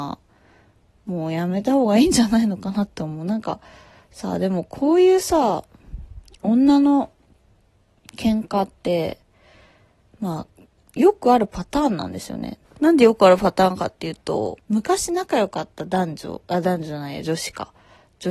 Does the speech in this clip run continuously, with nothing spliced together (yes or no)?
yes